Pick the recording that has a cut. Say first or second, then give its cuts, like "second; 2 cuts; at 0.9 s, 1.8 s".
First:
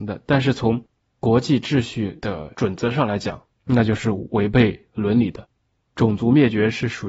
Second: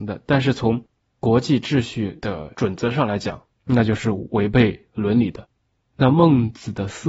second; 1 cut; at 5.9 s